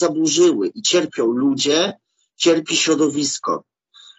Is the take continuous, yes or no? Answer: no